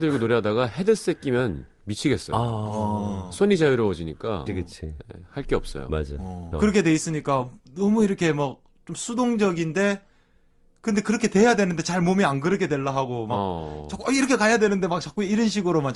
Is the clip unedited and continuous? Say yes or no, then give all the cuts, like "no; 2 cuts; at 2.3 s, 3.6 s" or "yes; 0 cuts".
no; 2 cuts; at 4.5 s, 6.5 s